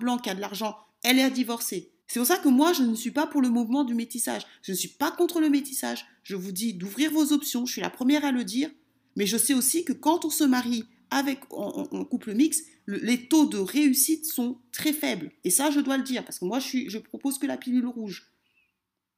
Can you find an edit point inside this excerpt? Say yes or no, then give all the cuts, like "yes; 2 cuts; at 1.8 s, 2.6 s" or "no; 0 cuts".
yes; 1 cut; at 2.0 s